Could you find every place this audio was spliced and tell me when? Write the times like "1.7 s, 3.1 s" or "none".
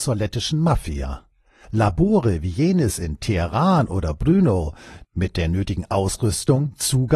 1.6 s